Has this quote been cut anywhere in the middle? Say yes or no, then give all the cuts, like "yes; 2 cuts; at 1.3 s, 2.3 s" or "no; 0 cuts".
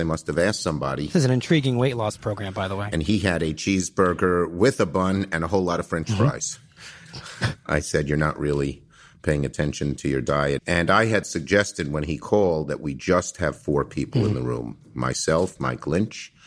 yes; 2 cuts; at 10.6 s, 15.6 s